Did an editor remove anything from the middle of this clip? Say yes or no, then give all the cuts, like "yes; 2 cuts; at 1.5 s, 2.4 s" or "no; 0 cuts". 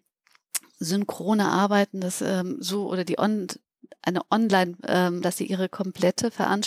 yes; 1 cut; at 5.2 s